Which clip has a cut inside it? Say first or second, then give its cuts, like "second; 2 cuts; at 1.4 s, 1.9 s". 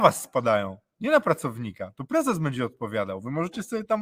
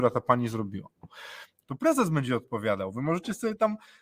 second; 1 cut; at 1.6 s